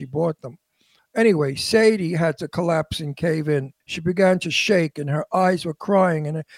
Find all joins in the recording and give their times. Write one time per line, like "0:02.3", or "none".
0:01.0
0:03.8